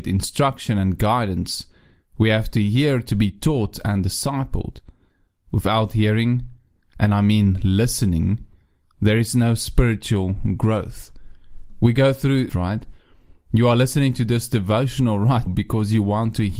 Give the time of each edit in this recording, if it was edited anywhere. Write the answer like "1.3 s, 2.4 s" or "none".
12.5 s, 15.5 s